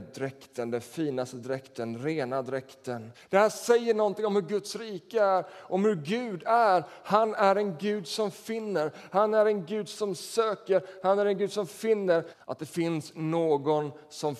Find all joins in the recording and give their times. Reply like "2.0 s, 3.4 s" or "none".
3.1 s, 12.3 s

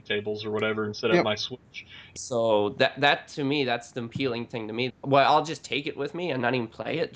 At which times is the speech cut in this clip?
2.2 s, 4.9 s

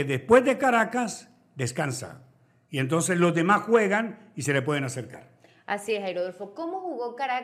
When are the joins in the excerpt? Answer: none

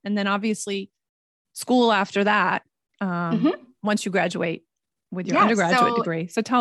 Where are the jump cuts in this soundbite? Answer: none

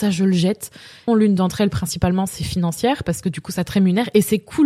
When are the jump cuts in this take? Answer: 1.1 s

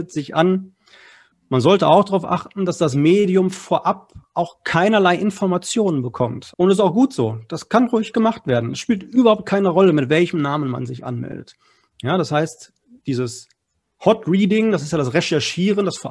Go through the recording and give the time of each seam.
1.3 s, 6.5 s

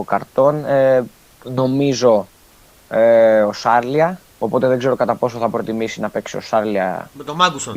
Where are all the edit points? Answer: 1.3 s, 4.3 s

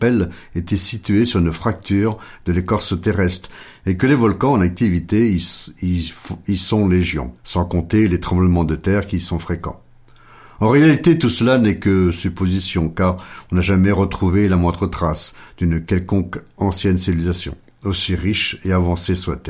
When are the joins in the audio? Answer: 7.4 s

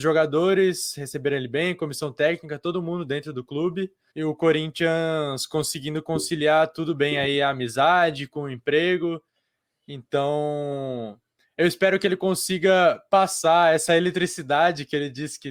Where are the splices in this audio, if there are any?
4.1 s

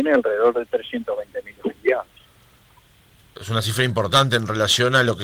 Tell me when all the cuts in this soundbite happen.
none

